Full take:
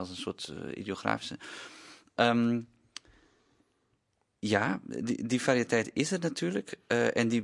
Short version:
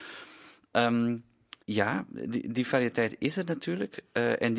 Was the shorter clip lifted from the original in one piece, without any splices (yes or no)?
no